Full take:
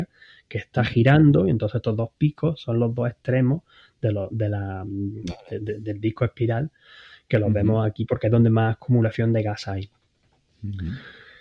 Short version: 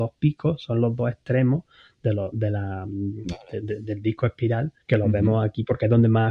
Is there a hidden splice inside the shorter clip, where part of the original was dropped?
yes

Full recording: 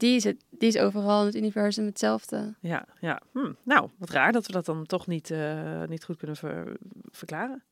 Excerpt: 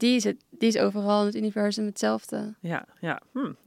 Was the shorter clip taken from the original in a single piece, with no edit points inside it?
yes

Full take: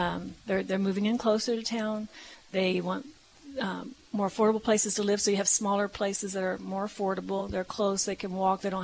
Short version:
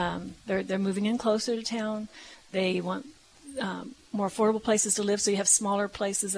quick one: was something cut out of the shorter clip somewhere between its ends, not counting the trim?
no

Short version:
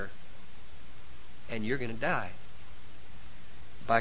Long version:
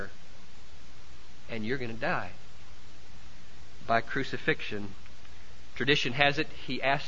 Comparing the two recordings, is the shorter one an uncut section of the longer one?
yes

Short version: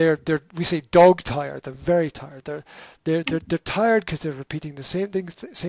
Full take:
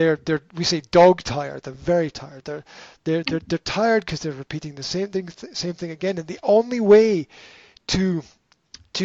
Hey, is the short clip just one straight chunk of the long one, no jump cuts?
yes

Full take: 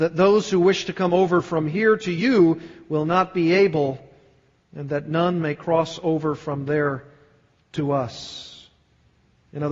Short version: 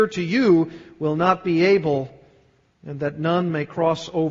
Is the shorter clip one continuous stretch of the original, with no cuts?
yes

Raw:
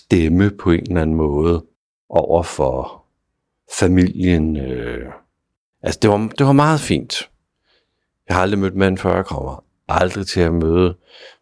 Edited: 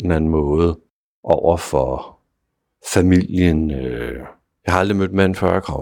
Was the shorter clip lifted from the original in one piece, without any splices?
no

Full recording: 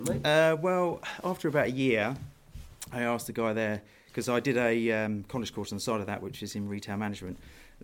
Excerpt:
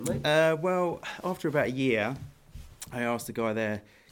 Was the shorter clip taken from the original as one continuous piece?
yes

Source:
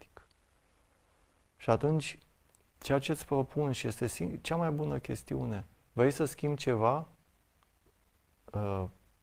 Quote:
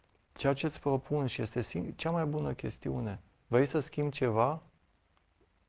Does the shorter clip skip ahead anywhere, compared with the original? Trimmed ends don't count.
no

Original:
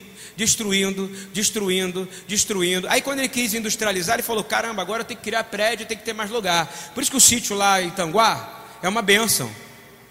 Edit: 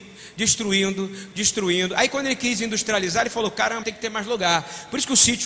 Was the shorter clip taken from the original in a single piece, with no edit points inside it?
no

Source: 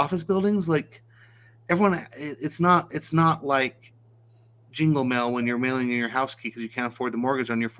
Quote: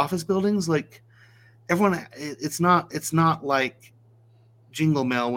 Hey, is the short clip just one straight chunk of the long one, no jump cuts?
yes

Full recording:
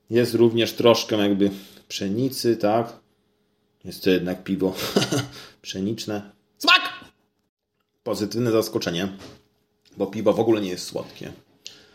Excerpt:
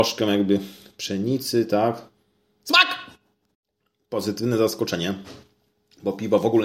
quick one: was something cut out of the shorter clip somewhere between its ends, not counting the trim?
yes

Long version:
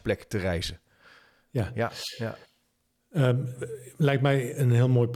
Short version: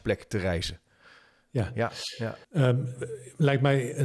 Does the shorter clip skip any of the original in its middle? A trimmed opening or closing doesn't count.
yes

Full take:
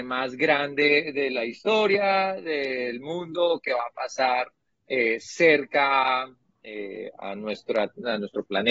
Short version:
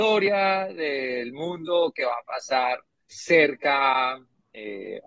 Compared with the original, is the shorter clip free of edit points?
no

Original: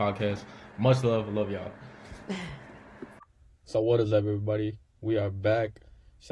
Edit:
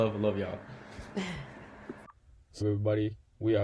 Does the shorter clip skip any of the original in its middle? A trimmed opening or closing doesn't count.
yes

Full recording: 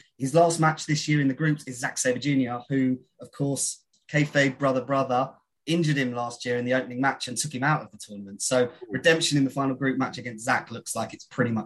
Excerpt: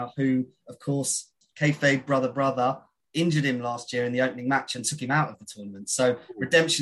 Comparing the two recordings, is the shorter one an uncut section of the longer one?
yes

